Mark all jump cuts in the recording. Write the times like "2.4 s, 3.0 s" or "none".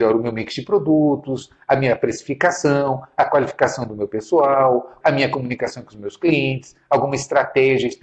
5.0 s